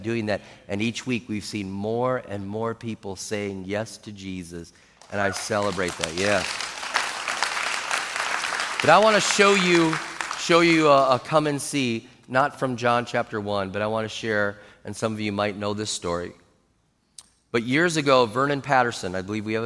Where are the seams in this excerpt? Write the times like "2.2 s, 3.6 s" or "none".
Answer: none